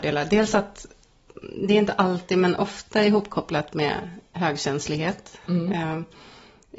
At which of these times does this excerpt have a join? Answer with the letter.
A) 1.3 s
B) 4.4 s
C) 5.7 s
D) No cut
D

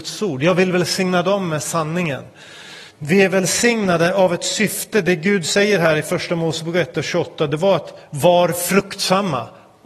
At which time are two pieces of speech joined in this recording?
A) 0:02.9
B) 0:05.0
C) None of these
A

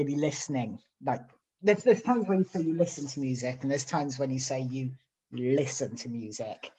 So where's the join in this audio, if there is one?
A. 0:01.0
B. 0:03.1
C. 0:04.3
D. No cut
D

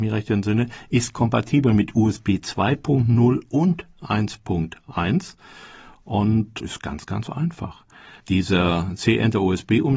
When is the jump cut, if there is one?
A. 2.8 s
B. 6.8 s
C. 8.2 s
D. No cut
C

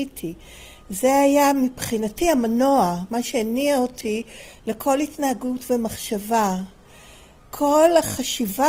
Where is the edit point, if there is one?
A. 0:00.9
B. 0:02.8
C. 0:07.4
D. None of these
C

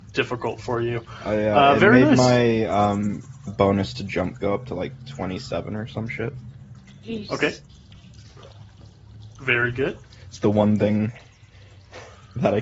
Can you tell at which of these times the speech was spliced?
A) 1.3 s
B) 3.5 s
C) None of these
B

